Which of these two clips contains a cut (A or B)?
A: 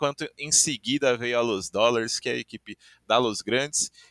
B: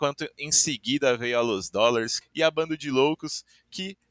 B